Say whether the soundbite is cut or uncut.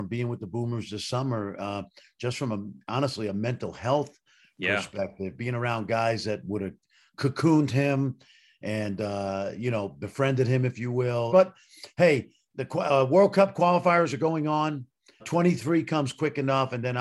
cut